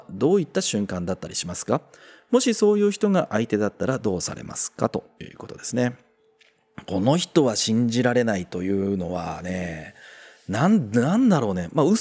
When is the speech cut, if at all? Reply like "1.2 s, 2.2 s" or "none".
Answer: none